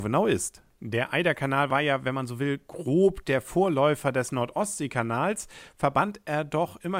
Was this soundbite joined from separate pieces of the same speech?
no; 0 cuts

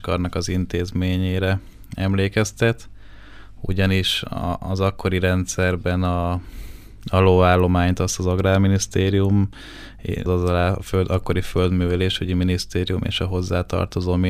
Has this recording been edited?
yes; 1 cut; at 10.3 s

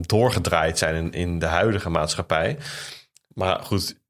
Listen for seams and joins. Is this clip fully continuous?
yes; 0 cuts

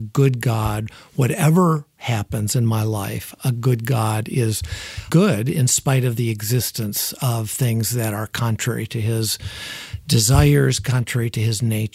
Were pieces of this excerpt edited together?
yes; 1 cut; at 5.1 s

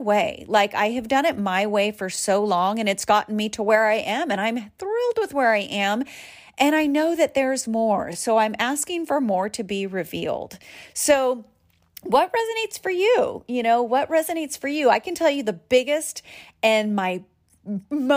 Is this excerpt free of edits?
yes; 0 cuts

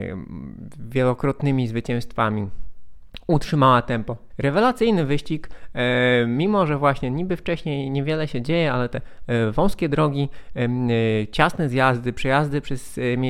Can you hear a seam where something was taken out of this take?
yes; 1 cut; at 4.3 s

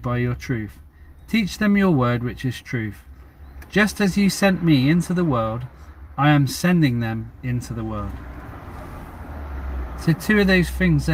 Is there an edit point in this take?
no; 0 cuts

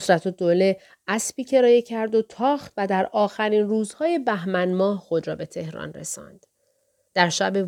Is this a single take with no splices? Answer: yes; 0 cuts

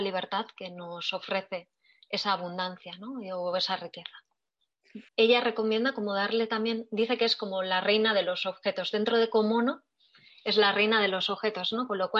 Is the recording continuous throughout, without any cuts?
no; 1 cut; at 5.1 s

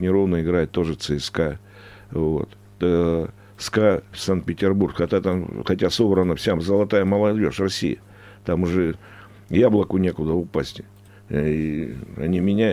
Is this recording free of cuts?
yes; 0 cuts

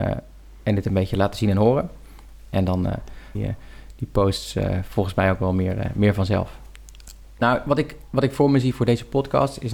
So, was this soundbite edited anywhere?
yes; 2 cuts; at 3.3 s, 7.4 s

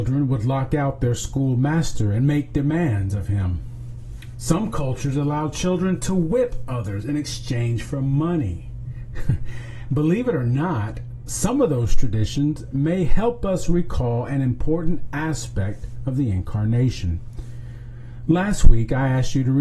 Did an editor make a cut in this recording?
no; 0 cuts

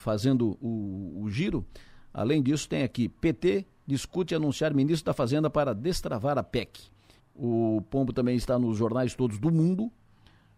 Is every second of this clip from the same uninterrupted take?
no; 1 cut; at 7.2 s

